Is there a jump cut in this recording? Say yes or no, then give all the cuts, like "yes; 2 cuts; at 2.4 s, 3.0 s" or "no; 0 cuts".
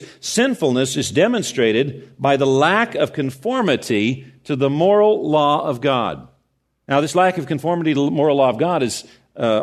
yes; 1 cut; at 6.8 s